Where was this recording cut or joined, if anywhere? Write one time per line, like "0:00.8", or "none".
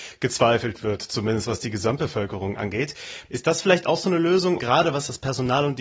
0:03.2
0:04.6